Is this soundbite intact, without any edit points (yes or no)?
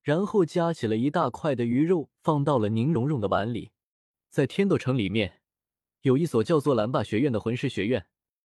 yes